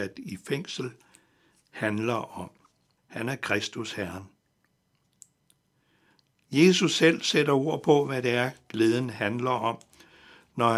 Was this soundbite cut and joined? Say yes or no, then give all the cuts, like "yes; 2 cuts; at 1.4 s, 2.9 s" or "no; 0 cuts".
yes; 1 cut; at 3.0 s